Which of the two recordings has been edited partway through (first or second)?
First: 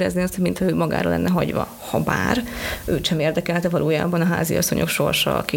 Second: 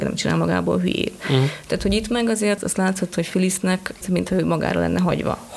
second